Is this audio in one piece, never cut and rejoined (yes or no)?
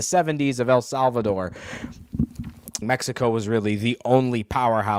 no